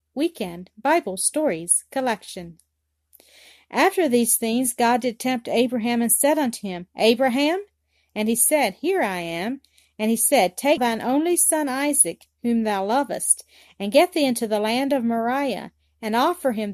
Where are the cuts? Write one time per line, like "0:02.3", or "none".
0:10.8

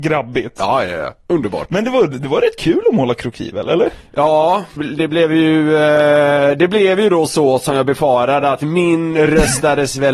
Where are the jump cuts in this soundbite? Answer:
0:04.8

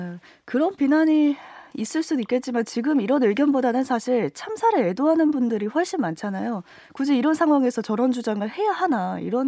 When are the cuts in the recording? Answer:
none

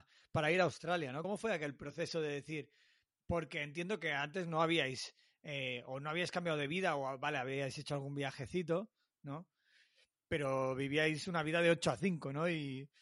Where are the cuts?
none

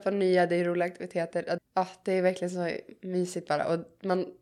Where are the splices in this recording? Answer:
0:01.6

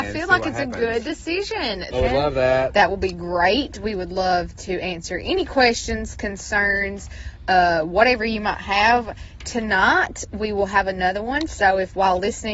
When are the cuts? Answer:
0:01.9
0:06.1

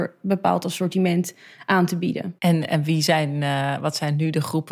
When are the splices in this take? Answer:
0:02.4

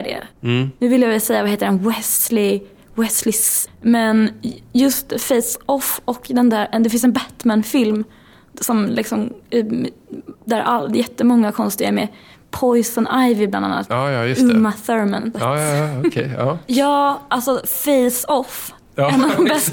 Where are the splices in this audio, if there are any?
0:03.7
0:15.3
0:16.7

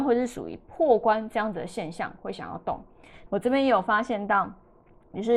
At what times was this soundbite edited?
0:03.3

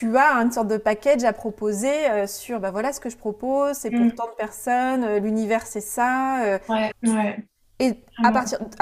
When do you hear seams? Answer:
0:06.9

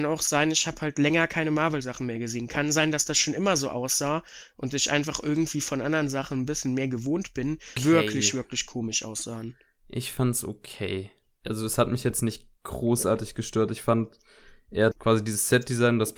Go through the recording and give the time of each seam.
0:07.8
0:14.9

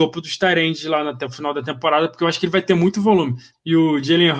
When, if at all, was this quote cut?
0:03.5

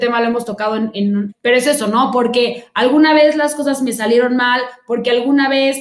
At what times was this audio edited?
0:01.3

